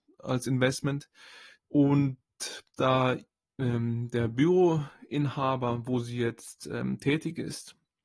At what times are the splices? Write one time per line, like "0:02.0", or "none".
0:01.6